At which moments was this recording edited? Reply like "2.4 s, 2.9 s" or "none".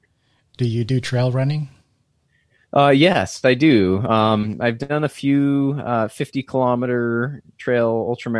none